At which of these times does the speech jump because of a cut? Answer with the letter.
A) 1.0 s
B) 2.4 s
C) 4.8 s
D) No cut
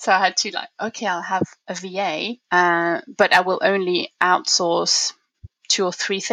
B